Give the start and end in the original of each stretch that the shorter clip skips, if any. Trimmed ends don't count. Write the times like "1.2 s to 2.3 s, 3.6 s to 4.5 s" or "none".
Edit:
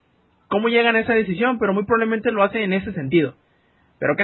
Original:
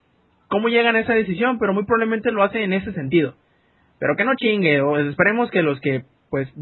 none